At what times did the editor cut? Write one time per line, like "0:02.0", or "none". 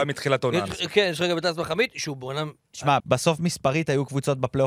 0:03.0